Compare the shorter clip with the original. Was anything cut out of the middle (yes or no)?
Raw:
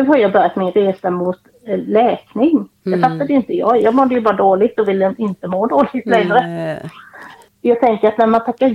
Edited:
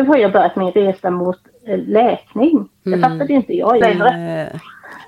yes